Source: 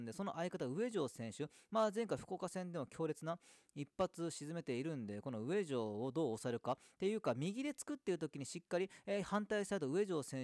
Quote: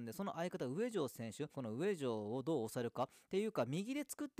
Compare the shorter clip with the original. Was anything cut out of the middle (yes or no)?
yes